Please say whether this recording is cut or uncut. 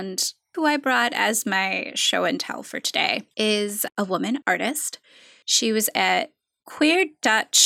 uncut